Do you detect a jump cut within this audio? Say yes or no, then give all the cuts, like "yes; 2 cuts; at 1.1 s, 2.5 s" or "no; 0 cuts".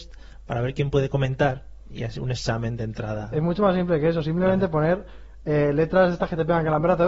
no; 0 cuts